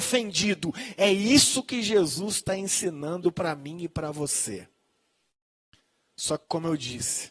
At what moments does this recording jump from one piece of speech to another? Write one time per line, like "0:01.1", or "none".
none